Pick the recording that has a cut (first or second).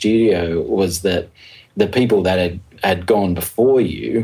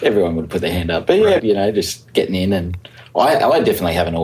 second